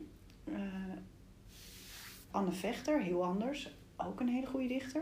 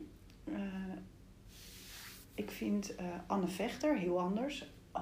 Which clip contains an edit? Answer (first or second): first